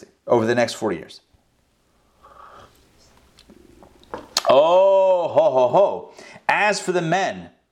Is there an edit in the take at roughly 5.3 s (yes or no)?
yes